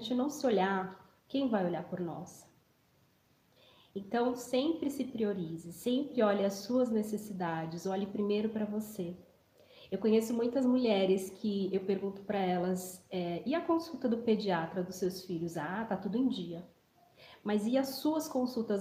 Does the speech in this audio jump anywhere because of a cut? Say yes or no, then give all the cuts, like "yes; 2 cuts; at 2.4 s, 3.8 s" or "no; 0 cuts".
no; 0 cuts